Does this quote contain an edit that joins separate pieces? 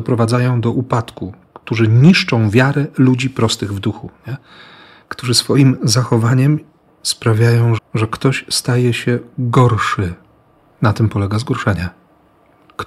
yes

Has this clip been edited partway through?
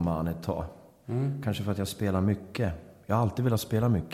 no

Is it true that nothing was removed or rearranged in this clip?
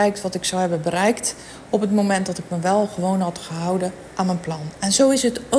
yes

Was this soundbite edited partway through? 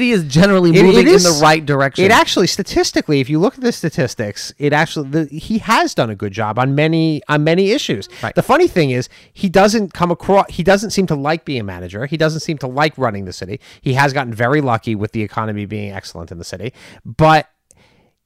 no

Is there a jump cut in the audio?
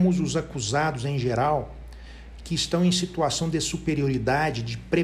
no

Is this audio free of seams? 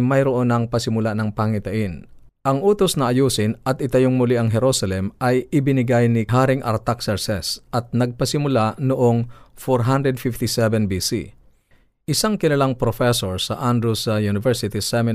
yes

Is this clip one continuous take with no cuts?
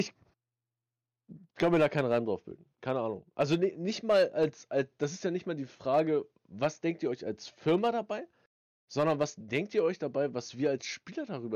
yes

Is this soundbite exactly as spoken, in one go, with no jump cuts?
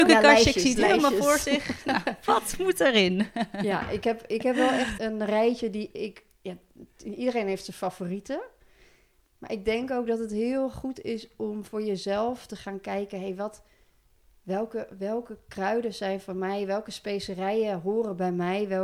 no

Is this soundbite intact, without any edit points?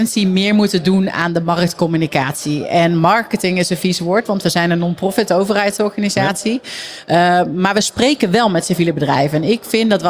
yes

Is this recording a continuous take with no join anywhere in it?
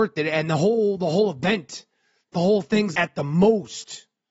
no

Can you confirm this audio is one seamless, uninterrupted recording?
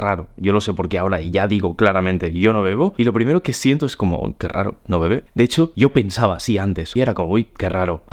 no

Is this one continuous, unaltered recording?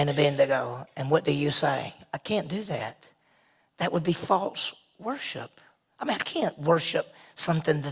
yes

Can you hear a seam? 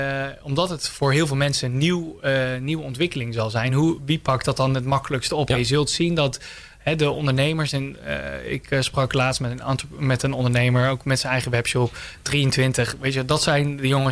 no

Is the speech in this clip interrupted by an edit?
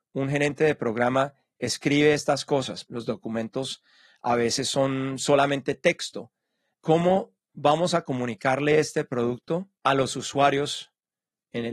yes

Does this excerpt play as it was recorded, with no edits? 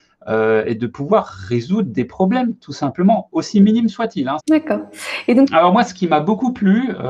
no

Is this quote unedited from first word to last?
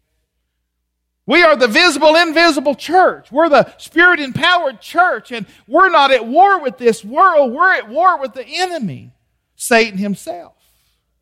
yes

